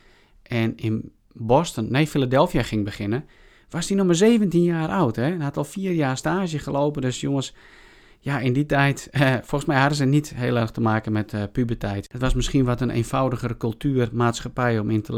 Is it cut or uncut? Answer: uncut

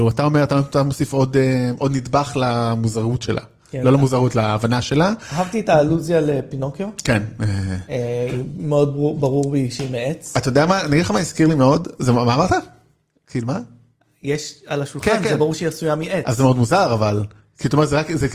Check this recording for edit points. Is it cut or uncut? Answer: uncut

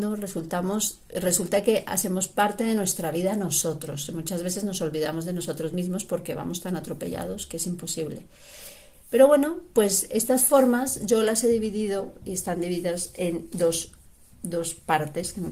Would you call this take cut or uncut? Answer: uncut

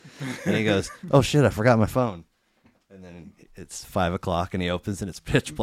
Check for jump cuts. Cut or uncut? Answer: uncut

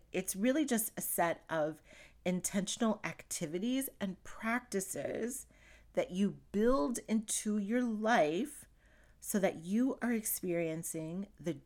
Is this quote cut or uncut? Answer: uncut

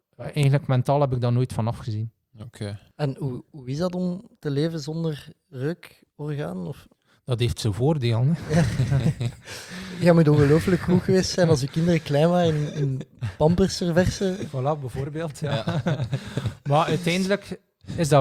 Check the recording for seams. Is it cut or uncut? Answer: uncut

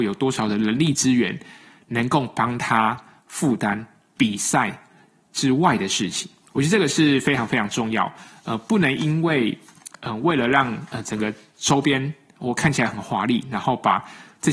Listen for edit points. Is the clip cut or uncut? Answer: uncut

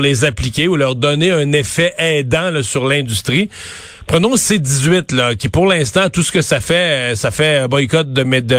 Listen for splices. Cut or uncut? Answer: uncut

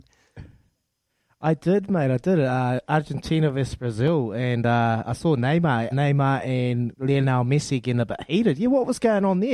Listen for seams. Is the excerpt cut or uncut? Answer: cut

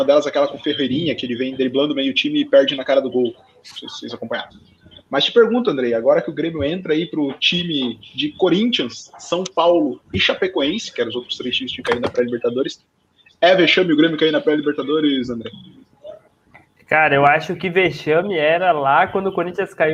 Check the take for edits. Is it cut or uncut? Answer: uncut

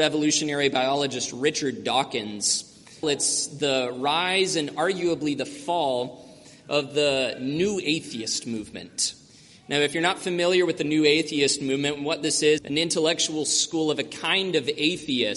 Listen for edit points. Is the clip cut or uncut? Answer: cut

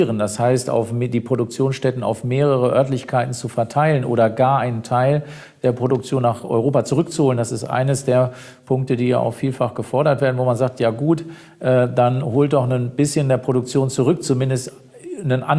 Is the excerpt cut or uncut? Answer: uncut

